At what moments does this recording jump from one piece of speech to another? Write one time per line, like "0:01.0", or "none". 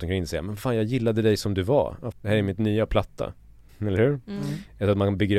0:02.1
0:03.7